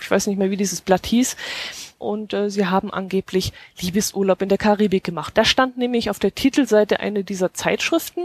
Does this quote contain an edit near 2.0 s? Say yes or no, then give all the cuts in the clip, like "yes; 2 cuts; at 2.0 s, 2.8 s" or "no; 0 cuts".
yes; 2 cuts; at 2.0 s, 5.3 s